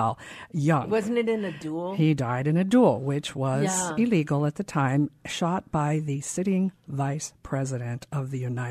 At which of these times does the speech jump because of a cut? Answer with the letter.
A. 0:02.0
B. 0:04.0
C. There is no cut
C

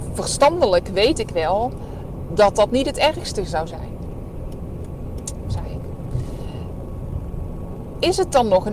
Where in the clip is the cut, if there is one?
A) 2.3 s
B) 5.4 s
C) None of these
B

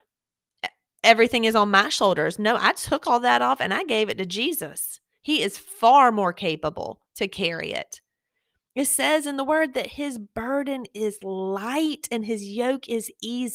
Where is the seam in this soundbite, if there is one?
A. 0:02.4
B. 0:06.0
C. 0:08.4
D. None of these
D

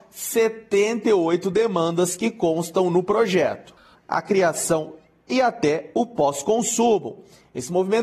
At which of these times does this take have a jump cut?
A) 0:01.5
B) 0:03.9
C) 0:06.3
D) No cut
B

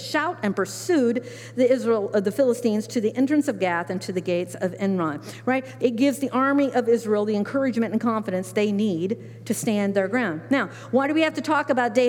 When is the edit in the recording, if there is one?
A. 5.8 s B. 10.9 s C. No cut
A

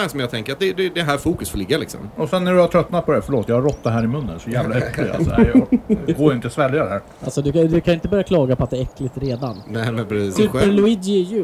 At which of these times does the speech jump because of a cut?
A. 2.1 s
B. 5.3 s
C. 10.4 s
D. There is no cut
C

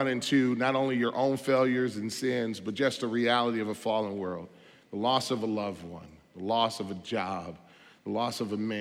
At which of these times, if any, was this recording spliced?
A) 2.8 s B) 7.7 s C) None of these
C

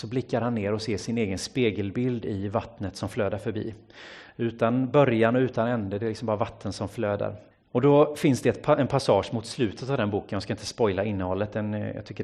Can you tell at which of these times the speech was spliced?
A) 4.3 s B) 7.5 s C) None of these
B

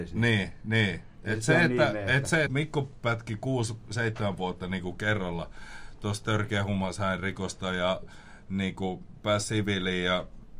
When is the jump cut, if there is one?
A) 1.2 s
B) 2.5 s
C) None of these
B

